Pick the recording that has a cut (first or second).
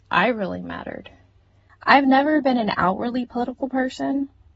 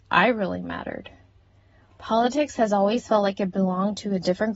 first